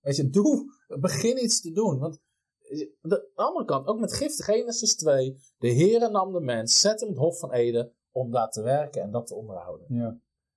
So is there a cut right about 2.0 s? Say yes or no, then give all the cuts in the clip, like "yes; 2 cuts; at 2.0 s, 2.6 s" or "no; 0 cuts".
no; 1 cut; at 4.4 s